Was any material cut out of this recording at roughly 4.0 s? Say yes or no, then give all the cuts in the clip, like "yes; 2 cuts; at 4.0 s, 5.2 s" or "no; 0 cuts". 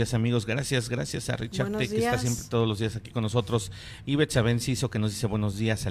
yes; 1 cut; at 4.0 s